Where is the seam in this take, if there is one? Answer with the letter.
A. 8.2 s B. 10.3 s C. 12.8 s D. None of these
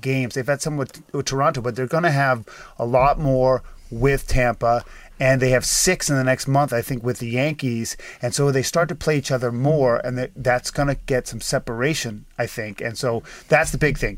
D